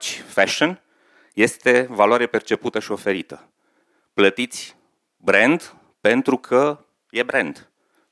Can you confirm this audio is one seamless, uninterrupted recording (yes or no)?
yes